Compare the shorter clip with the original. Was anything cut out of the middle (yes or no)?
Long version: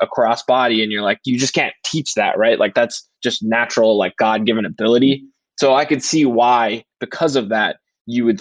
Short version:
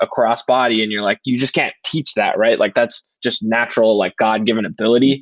no